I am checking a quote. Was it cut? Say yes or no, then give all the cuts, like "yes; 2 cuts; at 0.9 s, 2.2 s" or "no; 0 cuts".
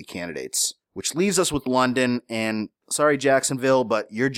no; 0 cuts